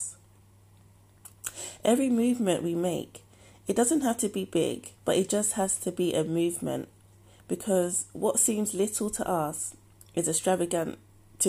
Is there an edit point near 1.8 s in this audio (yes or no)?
no